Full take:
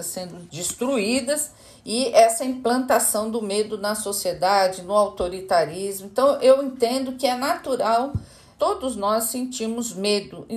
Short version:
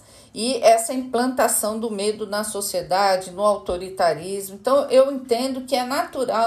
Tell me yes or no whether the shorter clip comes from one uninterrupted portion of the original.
yes